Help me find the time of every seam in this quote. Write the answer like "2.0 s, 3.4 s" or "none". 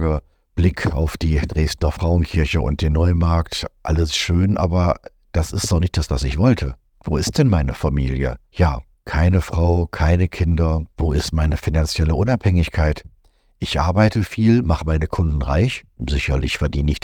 10.9 s